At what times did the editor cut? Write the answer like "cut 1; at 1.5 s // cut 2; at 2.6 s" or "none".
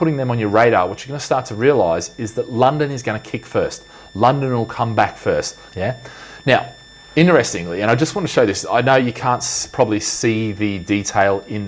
cut 1; at 5.7 s